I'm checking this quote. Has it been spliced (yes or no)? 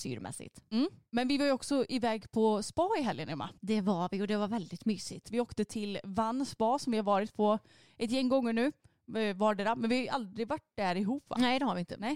yes